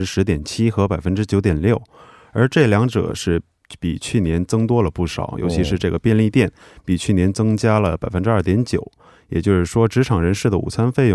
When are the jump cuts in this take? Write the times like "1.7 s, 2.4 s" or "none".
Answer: none